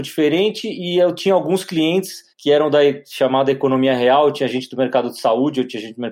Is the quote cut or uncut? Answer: cut